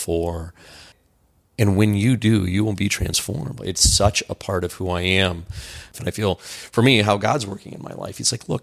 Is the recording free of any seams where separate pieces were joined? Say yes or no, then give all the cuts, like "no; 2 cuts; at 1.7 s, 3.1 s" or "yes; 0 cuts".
no; 2 cuts; at 3.6 s, 5.9 s